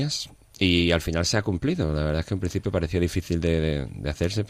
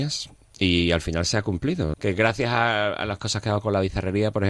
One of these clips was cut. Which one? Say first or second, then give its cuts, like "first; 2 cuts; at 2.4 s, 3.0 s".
second; 1 cut; at 1.9 s